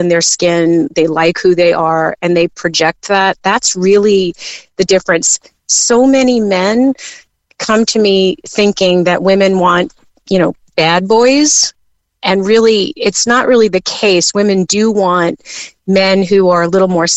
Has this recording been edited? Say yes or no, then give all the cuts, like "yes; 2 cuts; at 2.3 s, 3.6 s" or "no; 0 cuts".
no; 0 cuts